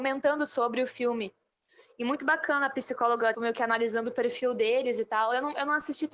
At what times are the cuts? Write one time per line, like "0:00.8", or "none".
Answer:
0:03.3